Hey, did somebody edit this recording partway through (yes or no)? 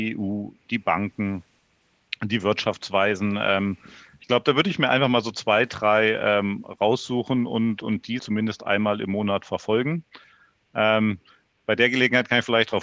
yes